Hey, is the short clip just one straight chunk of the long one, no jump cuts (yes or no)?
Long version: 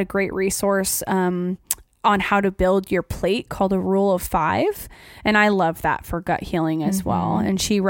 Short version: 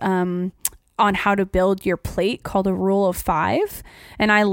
yes